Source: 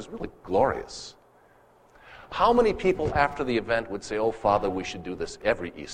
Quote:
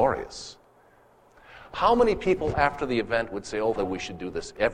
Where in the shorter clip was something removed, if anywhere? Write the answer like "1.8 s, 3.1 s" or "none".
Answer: 3.8 s